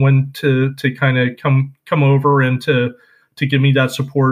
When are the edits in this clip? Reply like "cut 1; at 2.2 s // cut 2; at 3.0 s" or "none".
none